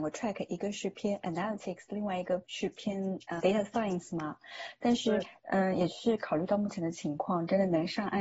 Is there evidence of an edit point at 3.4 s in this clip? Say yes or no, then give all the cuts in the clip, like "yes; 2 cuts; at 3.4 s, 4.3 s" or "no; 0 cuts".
yes; 1 cut; at 3.4 s